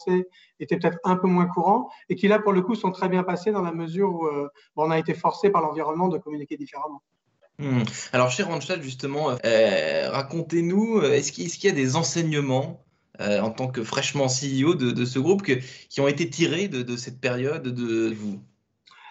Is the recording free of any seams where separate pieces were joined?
no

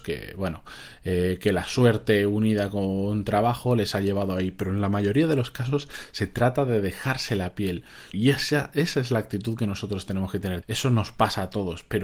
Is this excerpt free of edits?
no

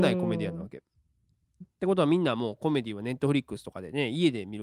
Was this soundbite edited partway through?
yes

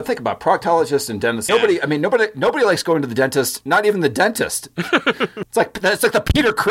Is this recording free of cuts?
no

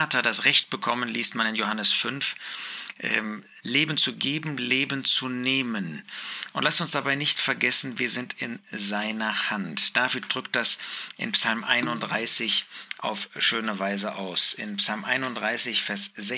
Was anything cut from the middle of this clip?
yes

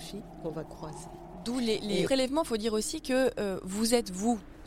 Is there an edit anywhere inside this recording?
yes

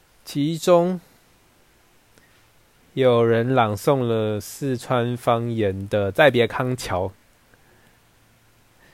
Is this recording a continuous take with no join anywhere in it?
yes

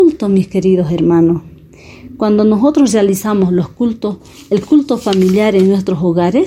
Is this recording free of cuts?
yes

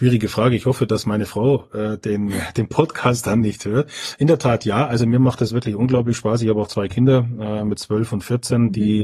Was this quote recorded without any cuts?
yes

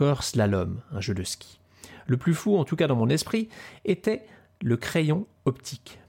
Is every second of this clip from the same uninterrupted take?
yes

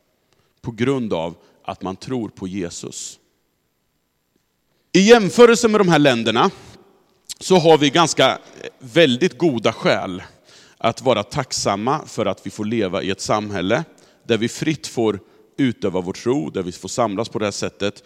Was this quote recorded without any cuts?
no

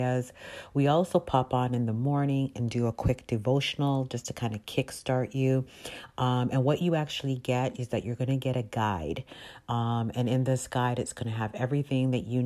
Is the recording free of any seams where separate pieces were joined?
yes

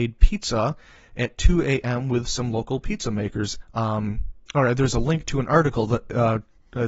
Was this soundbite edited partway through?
yes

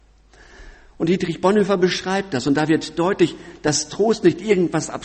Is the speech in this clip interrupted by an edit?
no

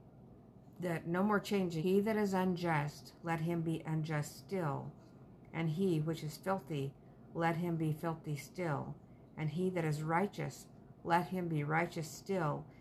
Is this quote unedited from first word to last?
no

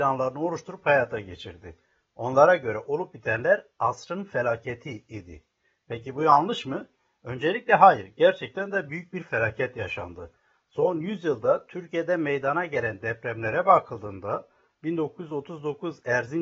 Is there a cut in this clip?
no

